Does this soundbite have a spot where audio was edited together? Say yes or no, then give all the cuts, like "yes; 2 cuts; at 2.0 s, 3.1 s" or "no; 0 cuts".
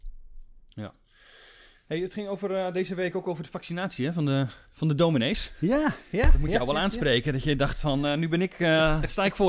no; 0 cuts